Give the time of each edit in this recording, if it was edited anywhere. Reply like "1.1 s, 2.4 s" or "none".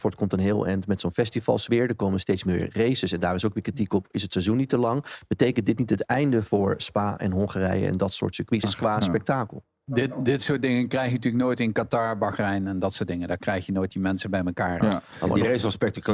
8.6 s, 14.8 s